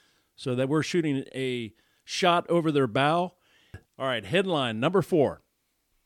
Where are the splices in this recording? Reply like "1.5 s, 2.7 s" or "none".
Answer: 3.8 s